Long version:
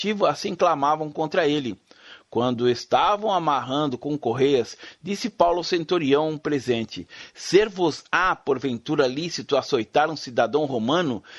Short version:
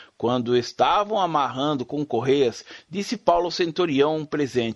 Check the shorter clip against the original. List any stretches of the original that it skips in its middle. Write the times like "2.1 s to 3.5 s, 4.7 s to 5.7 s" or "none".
none

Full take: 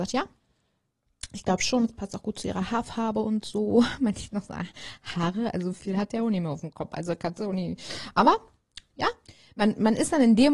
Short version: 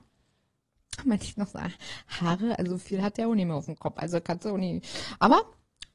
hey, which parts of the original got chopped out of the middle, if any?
1.3 s to 3.9 s

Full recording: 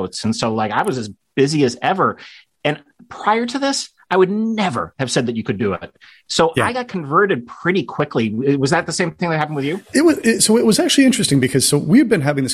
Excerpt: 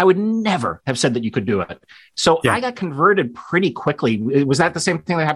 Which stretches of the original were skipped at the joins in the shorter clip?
none

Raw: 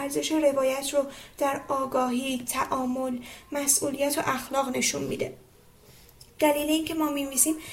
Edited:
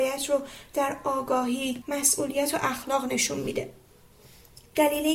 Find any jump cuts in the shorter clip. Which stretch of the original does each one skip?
2.5 s to 3.5 s

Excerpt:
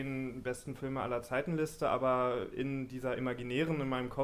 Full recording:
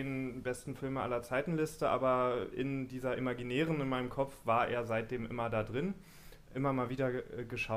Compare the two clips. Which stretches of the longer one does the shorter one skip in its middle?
none

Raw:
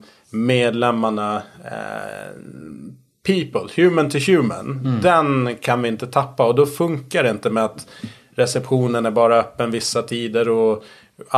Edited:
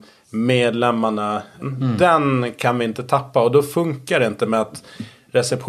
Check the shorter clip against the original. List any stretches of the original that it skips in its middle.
1.6 s to 4.7 s

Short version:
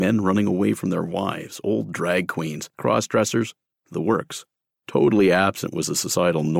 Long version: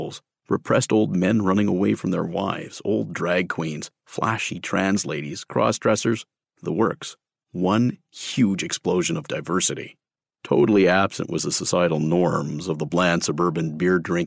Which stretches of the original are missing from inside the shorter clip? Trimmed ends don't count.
3.9 s to 5.4 s, 7.4 s to 10.2 s

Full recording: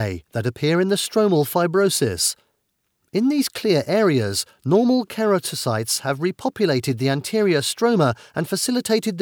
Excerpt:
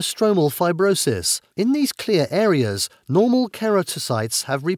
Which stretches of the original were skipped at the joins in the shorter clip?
2.4 s to 3.1 s

